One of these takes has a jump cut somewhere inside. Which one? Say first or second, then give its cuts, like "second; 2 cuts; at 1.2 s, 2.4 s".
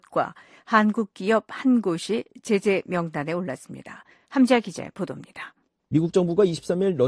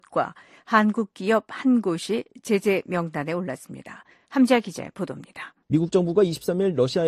second; 1 cut; at 5.6 s